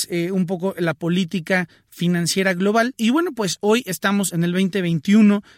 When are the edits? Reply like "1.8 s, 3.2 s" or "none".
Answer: none